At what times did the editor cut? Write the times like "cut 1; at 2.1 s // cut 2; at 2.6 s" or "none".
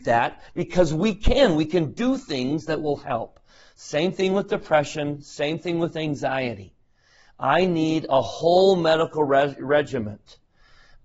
none